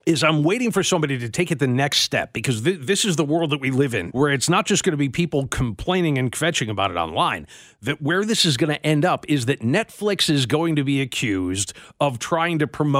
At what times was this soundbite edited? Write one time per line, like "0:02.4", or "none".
0:04.1